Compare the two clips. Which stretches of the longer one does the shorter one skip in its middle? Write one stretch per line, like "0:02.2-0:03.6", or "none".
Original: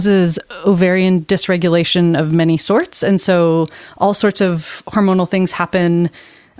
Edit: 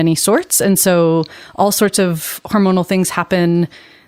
none